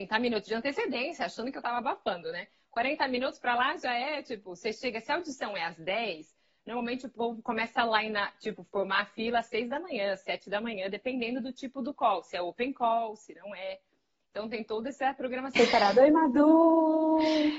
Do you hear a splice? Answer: yes; 1 cut; at 15.6 s

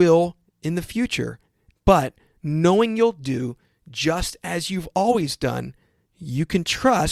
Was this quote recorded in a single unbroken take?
no; 1 cut; at 1.7 s

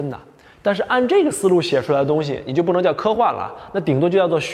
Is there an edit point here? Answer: no; 0 cuts

